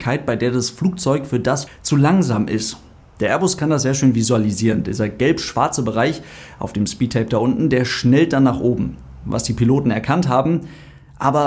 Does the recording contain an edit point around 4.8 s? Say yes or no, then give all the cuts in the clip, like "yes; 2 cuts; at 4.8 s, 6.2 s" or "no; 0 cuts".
no; 1 cut; at 1.7 s